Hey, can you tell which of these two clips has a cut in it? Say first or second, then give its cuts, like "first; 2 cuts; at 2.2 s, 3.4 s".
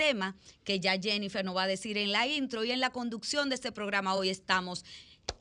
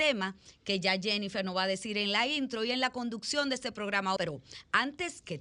second; 1 cut; at 4.2 s